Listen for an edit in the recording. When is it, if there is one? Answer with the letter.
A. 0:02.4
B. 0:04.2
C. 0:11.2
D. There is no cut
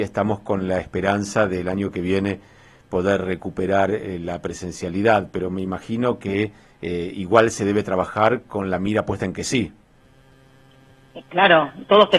D